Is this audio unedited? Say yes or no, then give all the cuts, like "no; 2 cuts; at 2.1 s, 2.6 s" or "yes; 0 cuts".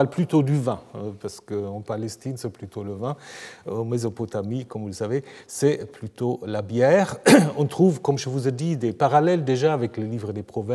yes; 0 cuts